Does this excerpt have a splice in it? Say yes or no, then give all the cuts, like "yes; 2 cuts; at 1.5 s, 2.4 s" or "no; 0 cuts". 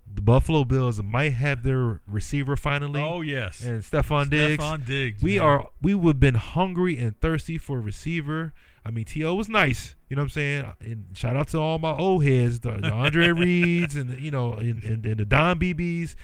no; 0 cuts